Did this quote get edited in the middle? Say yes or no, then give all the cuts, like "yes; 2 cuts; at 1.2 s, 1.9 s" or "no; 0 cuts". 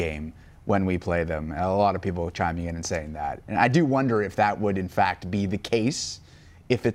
no; 0 cuts